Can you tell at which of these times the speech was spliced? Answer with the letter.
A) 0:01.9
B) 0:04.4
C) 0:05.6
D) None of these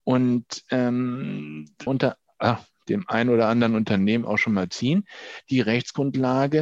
A